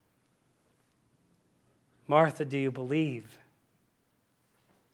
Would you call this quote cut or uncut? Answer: uncut